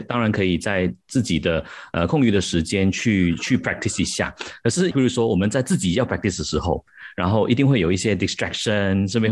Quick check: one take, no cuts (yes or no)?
no